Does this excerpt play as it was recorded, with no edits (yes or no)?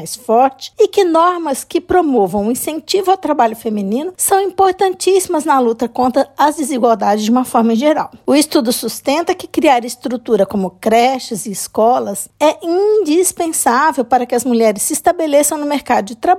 yes